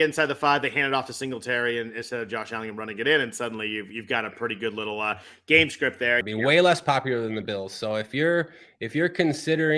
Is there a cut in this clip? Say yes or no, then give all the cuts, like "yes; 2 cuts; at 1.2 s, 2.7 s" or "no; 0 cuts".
yes; 1 cut; at 6.2 s